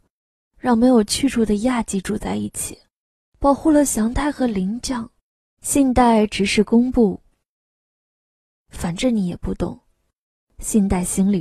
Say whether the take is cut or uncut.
cut